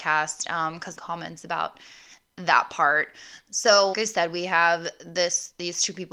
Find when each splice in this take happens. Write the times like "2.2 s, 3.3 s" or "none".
0.9 s, 3.9 s